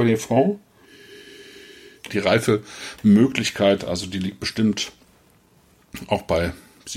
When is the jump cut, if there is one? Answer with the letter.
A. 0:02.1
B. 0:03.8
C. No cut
A